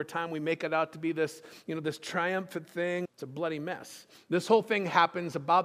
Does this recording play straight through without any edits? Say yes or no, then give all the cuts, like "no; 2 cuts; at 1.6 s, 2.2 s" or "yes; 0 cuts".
no; 2 cuts; at 3.0 s, 4.2 s